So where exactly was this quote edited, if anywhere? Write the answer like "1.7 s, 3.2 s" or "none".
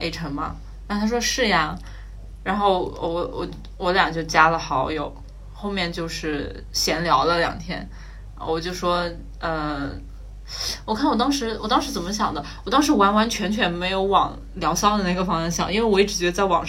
none